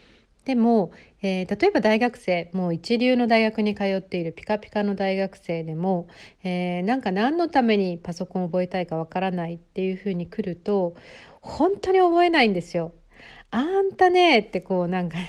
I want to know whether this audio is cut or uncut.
uncut